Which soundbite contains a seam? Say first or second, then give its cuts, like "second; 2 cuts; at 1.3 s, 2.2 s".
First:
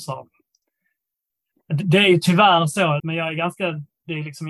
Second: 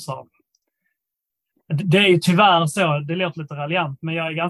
first; 1 cut; at 3.0 s